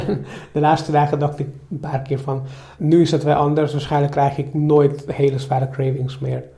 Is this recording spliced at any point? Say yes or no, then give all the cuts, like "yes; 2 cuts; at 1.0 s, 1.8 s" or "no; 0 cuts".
yes; 1 cut; at 2.8 s